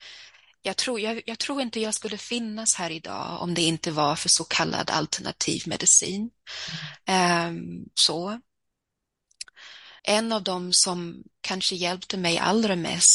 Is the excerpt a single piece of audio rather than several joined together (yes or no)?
no